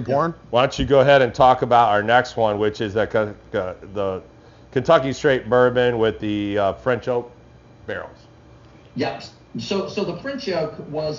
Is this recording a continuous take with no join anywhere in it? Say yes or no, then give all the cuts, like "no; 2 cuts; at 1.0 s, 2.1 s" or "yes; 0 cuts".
yes; 0 cuts